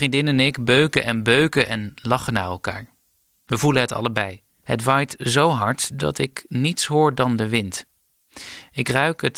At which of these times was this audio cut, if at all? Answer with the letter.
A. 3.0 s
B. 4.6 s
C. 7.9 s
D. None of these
B